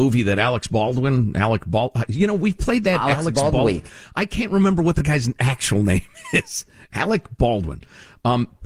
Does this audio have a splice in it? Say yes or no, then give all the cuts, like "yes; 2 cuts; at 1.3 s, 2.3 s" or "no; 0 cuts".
no; 0 cuts